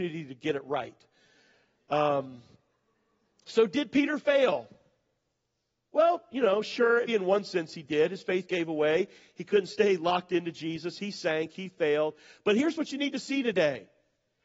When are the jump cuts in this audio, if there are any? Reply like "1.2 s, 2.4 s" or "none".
7.1 s